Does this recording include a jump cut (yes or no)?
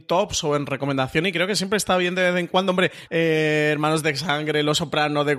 yes